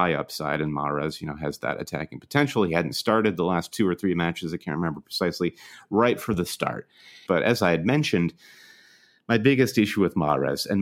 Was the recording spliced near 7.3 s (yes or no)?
yes